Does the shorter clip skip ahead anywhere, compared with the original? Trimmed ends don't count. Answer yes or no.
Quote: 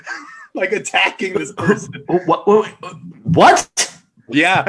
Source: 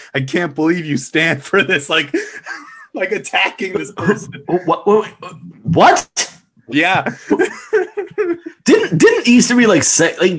no